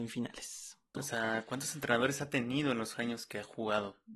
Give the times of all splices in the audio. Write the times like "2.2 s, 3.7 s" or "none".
0.9 s